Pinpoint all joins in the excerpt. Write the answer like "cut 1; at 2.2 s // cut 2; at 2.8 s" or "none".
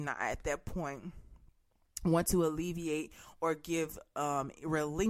none